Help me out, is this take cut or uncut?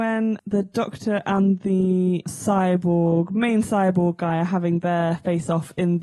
uncut